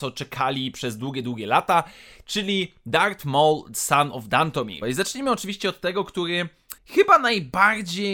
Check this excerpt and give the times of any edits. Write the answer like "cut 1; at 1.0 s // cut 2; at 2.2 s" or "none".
cut 1; at 4.8 s // cut 2; at 6.8 s